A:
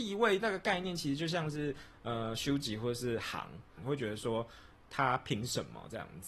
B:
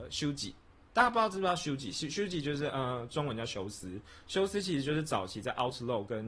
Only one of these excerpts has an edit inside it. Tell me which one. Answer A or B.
A